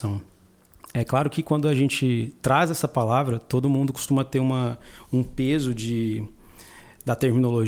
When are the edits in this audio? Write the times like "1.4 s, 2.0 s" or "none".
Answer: none